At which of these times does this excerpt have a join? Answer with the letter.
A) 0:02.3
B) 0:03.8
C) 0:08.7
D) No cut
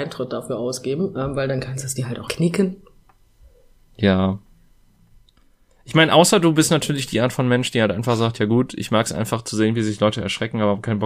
A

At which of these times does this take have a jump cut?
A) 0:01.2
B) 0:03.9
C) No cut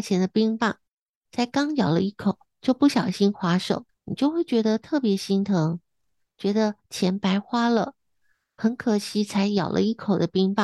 B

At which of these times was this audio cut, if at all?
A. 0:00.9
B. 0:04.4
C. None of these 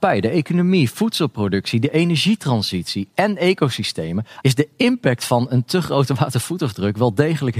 B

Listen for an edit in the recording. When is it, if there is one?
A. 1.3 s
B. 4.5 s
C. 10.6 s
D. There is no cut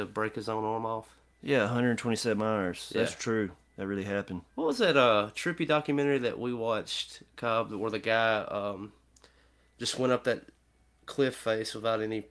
B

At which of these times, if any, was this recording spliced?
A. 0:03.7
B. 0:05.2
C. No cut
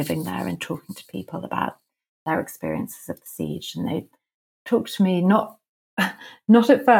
C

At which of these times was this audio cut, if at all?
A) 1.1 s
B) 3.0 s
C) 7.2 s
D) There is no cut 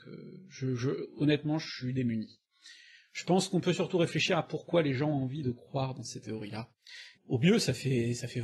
C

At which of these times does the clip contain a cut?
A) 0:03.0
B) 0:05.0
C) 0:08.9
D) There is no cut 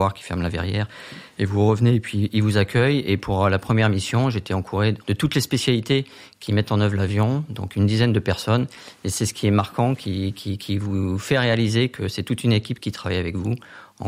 B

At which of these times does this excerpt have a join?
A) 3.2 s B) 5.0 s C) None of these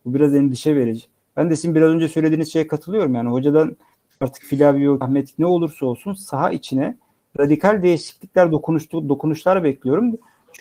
B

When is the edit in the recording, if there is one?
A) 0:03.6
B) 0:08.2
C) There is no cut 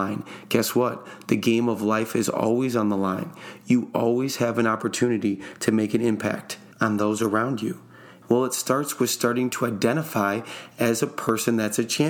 B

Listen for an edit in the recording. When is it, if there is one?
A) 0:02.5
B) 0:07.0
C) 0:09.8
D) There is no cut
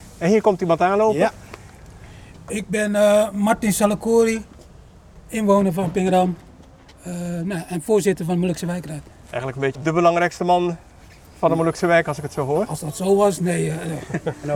C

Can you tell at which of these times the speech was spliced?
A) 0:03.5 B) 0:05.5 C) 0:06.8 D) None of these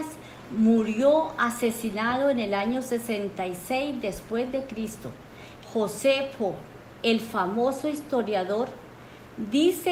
B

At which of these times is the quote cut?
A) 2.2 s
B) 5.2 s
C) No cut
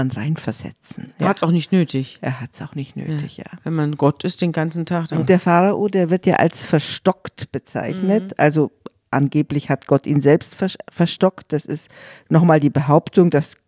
B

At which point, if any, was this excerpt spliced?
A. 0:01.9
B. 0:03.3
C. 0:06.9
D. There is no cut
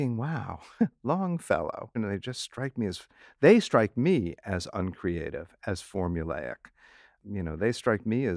A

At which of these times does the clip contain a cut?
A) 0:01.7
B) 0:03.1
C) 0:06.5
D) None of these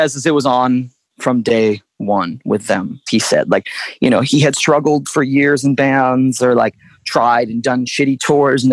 B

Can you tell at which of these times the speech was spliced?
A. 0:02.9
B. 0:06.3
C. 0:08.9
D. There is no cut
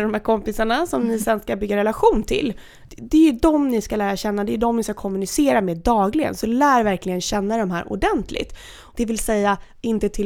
C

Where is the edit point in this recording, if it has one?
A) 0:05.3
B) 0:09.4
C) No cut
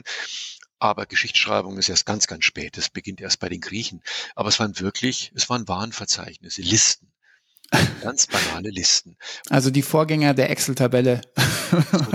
B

